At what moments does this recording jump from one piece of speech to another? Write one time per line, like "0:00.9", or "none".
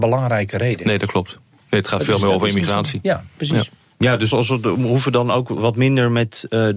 0:04.3

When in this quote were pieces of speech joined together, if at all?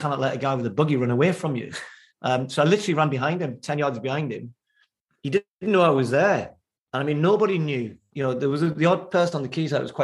none

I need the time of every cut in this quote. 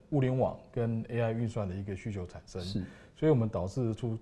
none

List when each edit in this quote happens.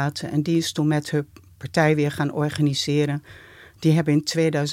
none

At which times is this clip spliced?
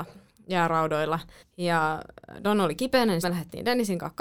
0:01.4
0:03.2

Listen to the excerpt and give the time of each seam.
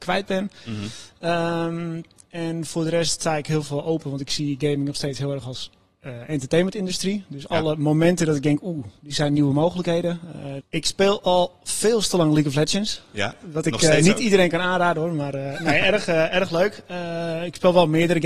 0:10.6

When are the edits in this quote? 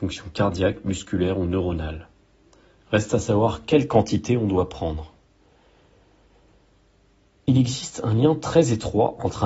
none

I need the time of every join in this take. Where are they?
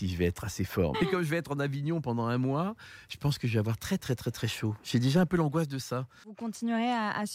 0:00.9
0:04.0

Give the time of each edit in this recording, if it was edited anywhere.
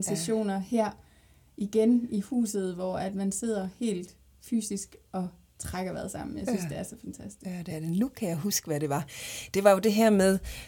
none

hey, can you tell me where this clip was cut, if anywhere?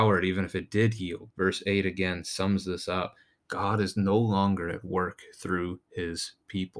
0:01.3
0:03.4

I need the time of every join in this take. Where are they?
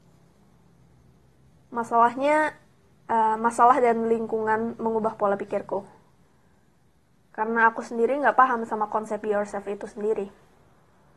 none

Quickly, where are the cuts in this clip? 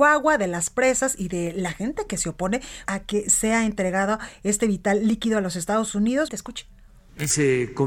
0:02.9
0:06.3

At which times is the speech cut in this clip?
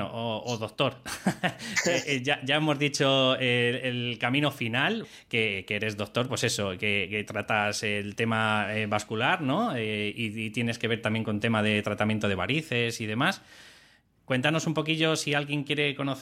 none

